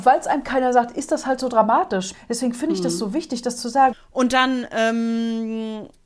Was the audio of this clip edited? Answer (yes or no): yes